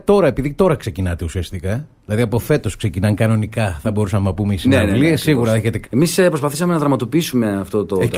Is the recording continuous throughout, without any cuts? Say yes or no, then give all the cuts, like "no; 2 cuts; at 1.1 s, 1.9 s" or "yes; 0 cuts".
no; 1 cut; at 5.8 s